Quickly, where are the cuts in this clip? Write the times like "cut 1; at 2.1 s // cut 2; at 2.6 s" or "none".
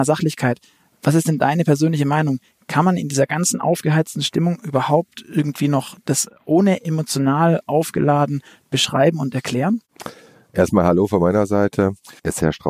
none